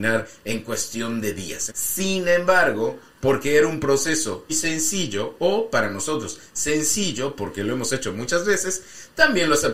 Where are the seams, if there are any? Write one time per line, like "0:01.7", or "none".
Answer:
0:01.7
0:04.5